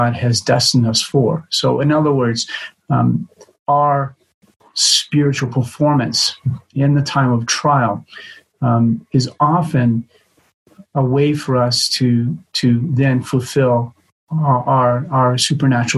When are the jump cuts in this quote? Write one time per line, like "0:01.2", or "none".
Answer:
none